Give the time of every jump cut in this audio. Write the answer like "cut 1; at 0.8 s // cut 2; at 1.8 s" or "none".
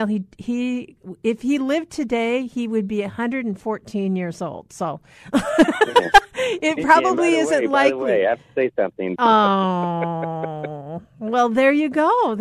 cut 1; at 9.2 s